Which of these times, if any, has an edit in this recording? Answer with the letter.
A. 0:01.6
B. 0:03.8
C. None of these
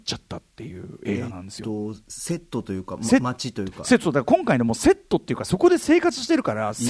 C